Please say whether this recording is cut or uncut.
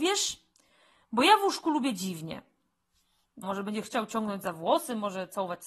cut